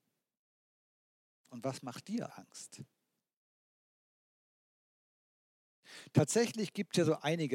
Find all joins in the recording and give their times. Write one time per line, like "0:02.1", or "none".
0:02.3